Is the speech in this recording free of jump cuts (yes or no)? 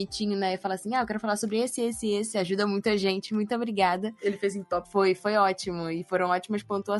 yes